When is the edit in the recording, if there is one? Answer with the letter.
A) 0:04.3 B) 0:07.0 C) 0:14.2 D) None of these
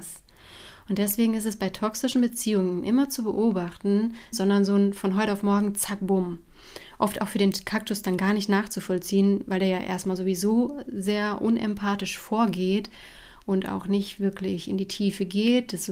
A